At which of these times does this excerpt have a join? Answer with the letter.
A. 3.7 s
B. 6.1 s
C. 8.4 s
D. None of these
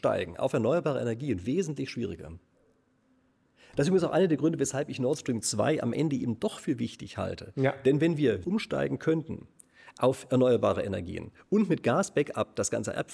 C